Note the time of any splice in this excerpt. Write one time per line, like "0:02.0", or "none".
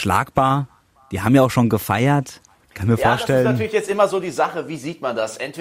none